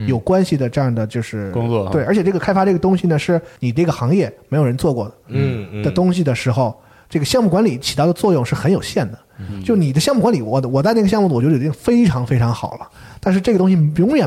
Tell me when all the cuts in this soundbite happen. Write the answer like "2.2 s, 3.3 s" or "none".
3.6 s